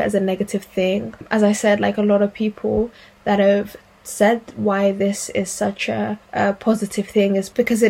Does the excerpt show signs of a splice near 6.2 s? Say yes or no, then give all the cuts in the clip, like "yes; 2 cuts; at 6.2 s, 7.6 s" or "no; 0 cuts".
yes; 1 cut; at 6.2 s